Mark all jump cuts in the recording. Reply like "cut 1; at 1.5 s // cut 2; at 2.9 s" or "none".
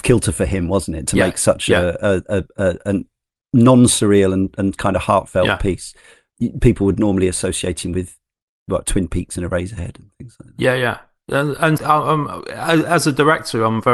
cut 1; at 11.8 s